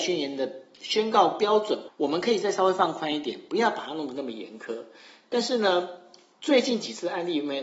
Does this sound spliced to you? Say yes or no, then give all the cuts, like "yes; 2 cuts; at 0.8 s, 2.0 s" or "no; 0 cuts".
yes; 1 cut; at 1.9 s